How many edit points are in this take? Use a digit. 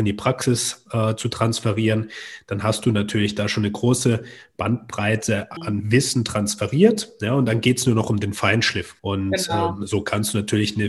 2